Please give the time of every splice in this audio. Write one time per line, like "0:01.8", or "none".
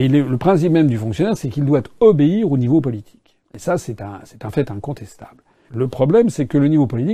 0:03.4
0:05.7